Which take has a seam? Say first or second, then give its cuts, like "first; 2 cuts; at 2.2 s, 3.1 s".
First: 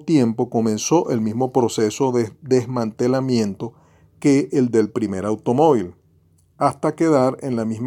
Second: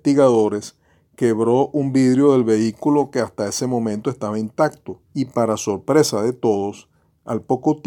second; 1 cut; at 5.0 s